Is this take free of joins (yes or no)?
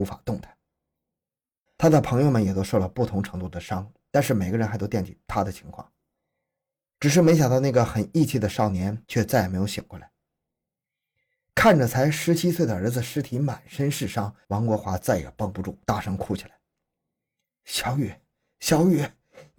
no